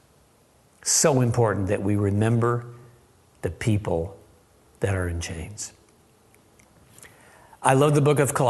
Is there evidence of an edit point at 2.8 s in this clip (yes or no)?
no